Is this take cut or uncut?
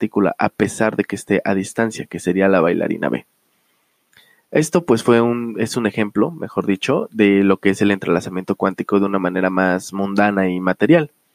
uncut